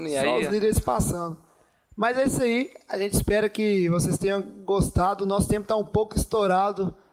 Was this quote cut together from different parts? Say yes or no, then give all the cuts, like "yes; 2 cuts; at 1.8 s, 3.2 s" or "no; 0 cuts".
no; 0 cuts